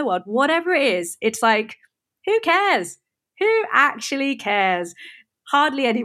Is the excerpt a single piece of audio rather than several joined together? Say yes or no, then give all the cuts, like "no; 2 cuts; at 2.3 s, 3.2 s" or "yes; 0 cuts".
yes; 0 cuts